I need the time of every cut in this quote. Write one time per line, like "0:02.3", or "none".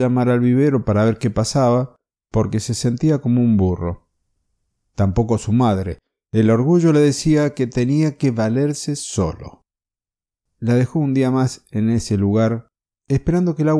none